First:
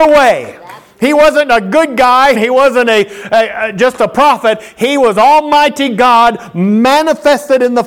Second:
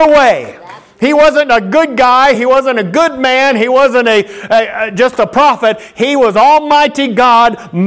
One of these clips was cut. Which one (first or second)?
first